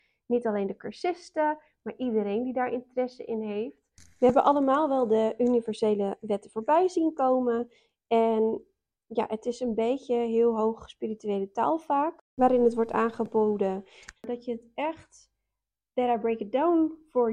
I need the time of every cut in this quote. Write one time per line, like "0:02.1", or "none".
0:14.2